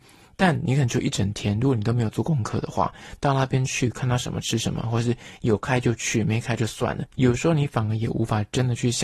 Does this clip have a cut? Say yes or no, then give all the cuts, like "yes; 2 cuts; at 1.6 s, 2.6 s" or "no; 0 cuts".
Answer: yes; 1 cut; at 7.1 s